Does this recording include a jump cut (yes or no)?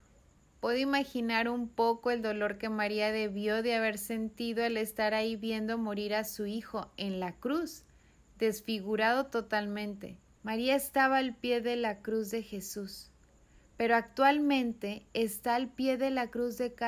yes